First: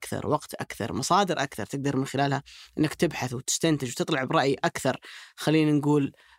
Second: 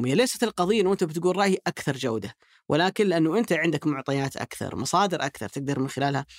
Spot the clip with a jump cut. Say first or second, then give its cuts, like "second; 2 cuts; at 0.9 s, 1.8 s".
second; 1 cut; at 4.7 s